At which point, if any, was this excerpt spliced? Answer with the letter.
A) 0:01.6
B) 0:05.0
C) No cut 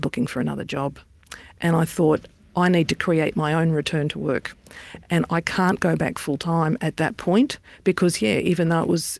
C